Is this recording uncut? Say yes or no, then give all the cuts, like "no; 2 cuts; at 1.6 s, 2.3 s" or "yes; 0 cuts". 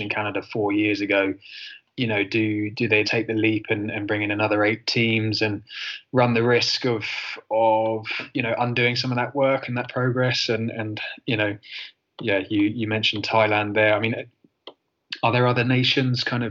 no; 1 cut; at 3.0 s